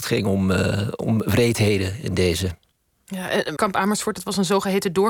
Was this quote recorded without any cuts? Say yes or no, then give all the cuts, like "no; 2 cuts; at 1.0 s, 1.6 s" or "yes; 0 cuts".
no; 1 cut; at 3.6 s